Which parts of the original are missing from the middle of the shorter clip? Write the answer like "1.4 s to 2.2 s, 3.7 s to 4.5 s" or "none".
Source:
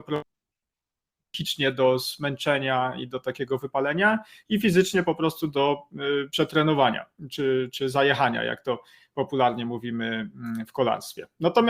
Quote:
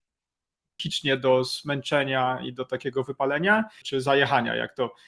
4.4 s to 7.7 s